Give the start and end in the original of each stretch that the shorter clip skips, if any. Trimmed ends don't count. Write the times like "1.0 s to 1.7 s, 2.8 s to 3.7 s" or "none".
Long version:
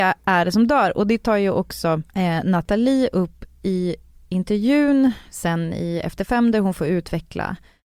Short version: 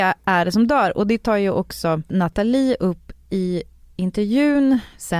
2.1 s to 2.4 s